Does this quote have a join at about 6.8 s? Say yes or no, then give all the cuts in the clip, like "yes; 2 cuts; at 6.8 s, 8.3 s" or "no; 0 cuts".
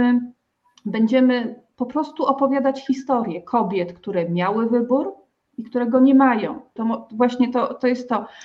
yes; 1 cut; at 6.8 s